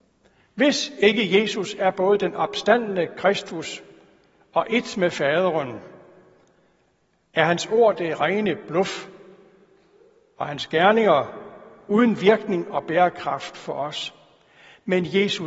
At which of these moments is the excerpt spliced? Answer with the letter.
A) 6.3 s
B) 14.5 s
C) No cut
C